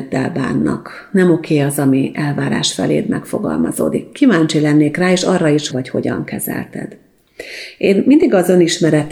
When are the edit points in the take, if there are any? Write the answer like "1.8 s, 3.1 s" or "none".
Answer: 5.7 s